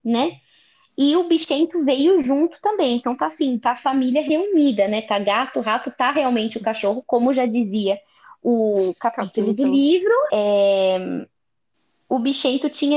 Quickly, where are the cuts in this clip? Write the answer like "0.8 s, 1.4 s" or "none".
10.3 s